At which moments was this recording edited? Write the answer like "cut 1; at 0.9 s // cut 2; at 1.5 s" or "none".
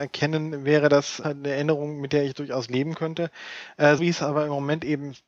cut 1; at 1.2 s // cut 2; at 4.0 s